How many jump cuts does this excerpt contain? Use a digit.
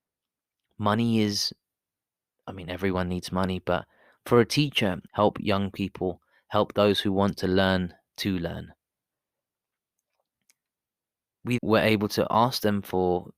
2